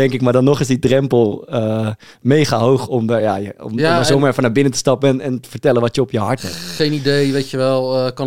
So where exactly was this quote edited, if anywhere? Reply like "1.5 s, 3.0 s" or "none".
none